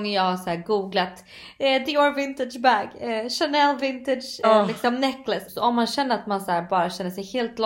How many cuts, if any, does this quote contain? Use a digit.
2